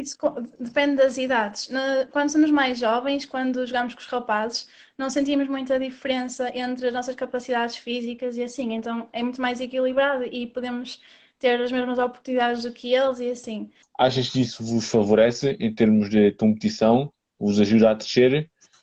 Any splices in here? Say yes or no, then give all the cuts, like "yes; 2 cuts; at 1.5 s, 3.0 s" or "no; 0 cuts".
yes; 1 cut; at 13.8 s